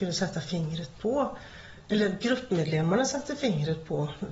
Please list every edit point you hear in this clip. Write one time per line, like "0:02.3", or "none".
none